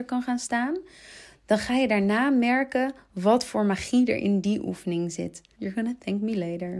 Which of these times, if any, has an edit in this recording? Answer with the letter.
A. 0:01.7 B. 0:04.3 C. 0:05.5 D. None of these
C